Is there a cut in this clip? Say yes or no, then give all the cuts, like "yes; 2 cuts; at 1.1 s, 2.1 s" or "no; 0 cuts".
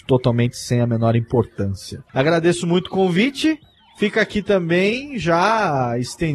no; 0 cuts